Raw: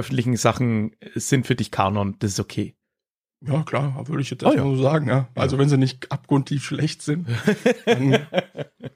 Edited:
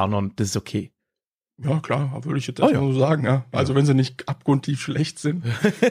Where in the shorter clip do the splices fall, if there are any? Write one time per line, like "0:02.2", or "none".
none